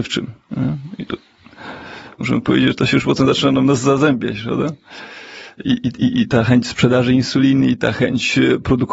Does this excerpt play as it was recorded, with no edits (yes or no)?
yes